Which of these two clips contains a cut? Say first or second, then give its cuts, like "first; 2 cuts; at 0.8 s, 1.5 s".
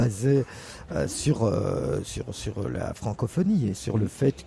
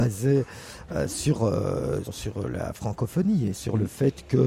second; 1 cut; at 2.0 s